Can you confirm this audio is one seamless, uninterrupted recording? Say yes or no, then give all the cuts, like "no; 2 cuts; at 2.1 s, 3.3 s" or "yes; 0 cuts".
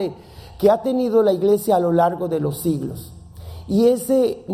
yes; 0 cuts